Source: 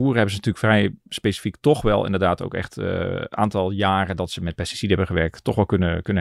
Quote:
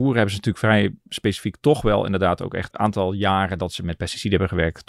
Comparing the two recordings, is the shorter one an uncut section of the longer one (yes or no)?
no